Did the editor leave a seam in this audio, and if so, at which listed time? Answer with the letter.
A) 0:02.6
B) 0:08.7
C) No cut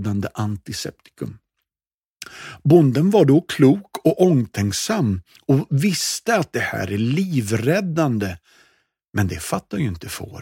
C